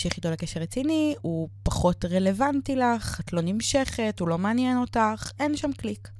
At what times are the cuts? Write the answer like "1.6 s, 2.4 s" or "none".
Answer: 1.2 s